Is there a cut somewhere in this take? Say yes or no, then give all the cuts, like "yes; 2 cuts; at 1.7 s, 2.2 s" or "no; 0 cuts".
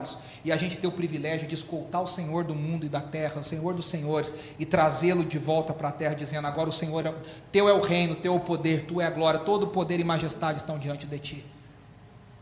no; 0 cuts